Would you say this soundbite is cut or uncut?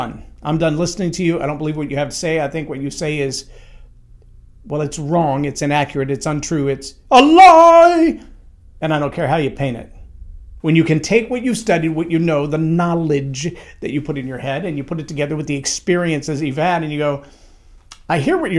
cut